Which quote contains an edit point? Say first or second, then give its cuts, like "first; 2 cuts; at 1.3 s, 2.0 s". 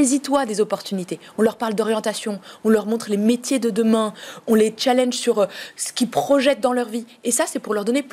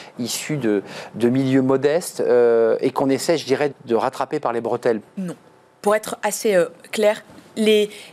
second; 2 cuts; at 3.7 s, 5.0 s